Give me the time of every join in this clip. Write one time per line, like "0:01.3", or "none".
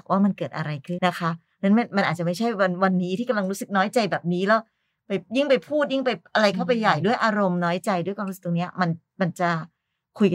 0:01.0